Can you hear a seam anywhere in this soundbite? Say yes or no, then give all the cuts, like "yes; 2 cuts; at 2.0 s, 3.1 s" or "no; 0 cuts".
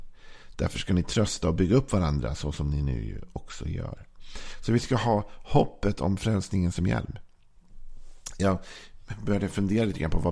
no; 0 cuts